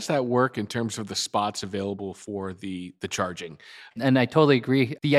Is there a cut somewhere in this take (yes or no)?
yes